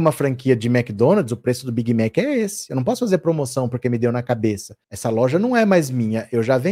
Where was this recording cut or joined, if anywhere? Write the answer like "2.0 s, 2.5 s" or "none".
4.8 s